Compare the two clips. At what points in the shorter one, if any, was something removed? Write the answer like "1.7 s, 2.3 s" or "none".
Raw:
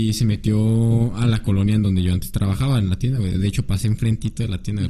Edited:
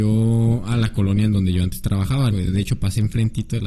2.3 s